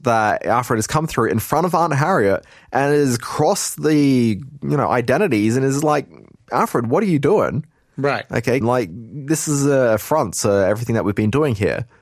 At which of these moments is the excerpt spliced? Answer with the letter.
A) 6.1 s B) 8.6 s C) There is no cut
B